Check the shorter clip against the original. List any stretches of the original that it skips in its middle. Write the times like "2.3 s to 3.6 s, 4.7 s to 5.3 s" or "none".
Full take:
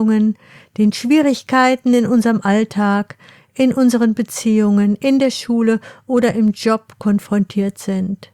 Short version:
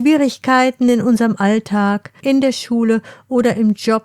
3.3 s to 5.0 s